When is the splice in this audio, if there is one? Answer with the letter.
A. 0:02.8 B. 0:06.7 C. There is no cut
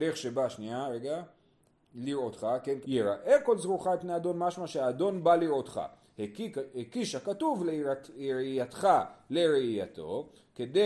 A